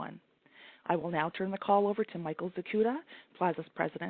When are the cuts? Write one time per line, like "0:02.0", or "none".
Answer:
none